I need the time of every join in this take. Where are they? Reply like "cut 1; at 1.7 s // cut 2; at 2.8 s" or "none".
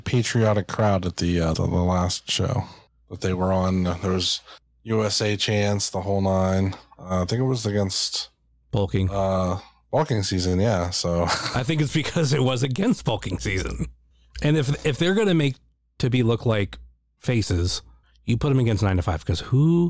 cut 1; at 1.5 s